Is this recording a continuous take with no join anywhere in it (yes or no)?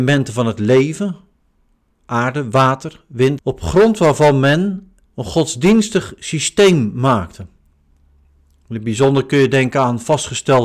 no